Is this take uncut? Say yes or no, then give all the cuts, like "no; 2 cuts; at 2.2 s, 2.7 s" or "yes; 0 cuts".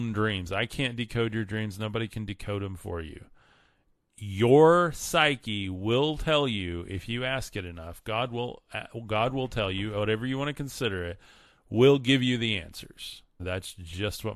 no; 1 cut; at 13.4 s